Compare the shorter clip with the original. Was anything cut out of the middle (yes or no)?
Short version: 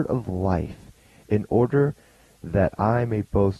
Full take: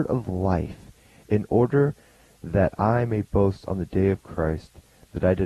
no